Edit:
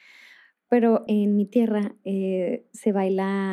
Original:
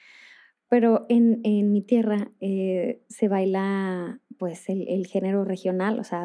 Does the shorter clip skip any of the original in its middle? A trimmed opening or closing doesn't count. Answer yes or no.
yes